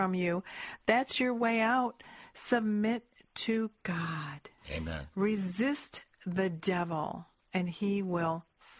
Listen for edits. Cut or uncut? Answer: cut